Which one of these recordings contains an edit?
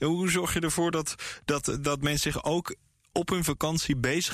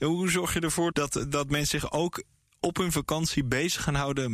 second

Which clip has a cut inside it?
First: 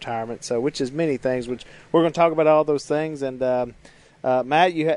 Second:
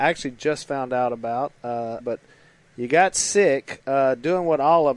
second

